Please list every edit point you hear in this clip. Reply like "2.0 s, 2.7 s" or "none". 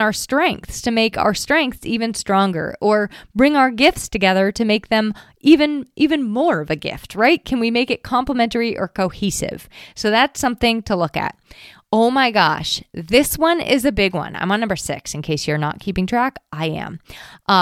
none